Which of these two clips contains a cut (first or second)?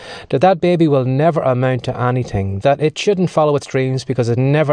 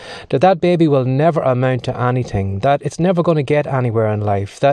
first